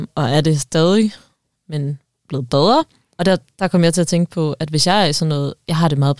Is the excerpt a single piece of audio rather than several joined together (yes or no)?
no